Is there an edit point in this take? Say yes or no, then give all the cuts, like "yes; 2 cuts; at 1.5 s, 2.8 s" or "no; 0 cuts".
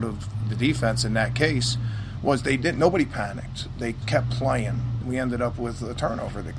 yes; 2 cuts; at 4.0 s, 5.0 s